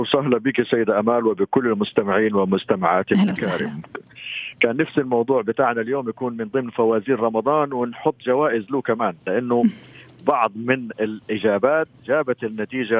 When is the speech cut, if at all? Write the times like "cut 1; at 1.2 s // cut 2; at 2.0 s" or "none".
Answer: cut 1; at 12.0 s